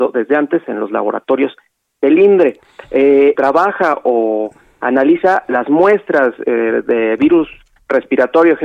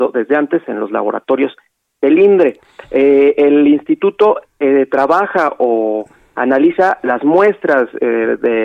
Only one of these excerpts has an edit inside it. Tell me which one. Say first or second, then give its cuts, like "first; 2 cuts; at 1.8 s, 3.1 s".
first; 1 cut; at 3.4 s